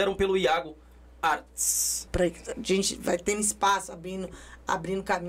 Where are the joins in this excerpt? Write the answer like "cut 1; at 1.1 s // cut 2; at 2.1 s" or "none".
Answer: cut 1; at 2.1 s